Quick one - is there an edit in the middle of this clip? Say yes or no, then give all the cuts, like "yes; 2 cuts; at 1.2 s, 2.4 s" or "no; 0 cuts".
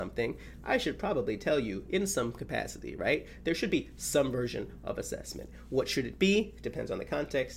no; 0 cuts